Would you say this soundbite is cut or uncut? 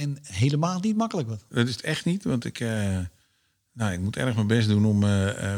cut